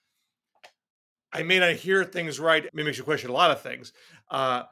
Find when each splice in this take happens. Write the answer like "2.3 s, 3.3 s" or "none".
2.7 s